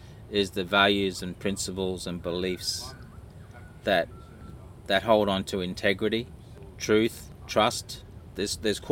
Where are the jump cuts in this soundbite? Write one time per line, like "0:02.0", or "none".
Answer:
none